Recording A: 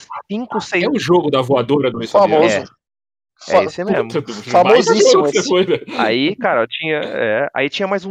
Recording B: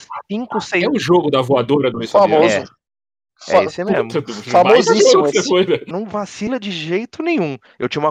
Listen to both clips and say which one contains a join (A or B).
B